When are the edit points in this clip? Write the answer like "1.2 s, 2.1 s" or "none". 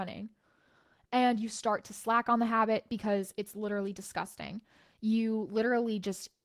none